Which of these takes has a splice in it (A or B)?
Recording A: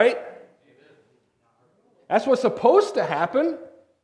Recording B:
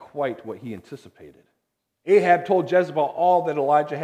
B